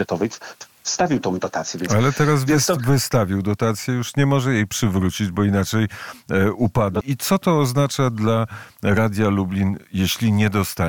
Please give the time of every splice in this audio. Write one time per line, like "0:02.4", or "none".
0:07.0